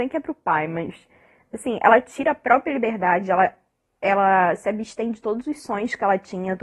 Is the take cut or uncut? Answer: uncut